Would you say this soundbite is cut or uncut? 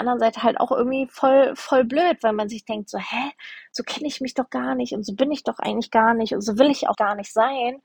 cut